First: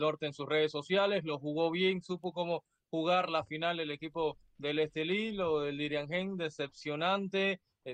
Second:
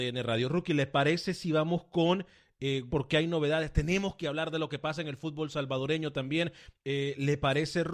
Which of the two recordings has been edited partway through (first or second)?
second